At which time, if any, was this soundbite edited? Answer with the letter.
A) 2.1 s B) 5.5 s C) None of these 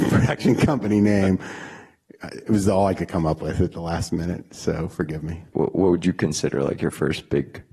B